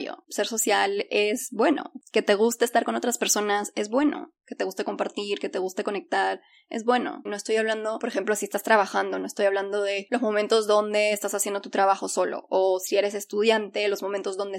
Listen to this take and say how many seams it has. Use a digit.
1